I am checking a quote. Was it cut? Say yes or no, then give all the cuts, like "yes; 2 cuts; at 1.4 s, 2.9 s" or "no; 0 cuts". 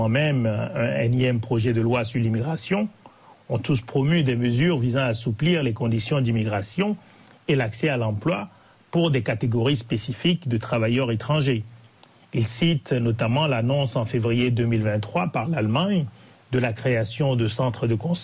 no; 0 cuts